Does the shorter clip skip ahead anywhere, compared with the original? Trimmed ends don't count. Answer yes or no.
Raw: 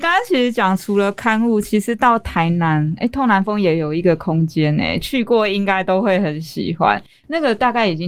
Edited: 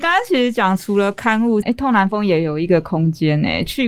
yes